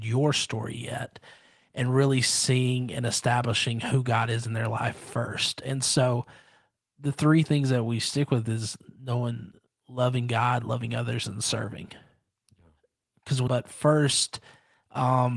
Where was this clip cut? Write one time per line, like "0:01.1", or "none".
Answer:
0:13.5